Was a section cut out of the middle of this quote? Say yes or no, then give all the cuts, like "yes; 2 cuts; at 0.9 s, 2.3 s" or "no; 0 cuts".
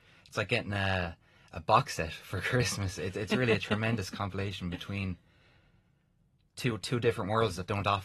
no; 0 cuts